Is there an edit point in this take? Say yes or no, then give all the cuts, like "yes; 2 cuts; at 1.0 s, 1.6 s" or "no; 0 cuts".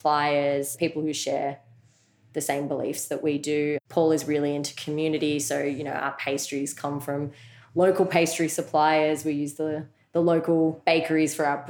no; 0 cuts